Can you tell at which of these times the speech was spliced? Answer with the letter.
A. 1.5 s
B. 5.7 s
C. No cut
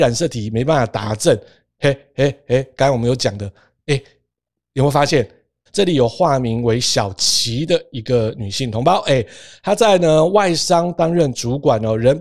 B